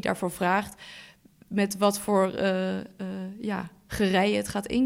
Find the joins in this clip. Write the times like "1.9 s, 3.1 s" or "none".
none